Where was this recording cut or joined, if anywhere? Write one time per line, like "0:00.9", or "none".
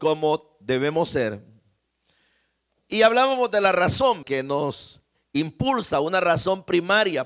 0:04.2